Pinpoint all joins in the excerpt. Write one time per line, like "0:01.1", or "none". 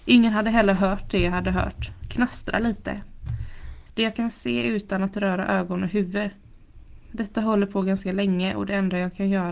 0:02.0
0:03.9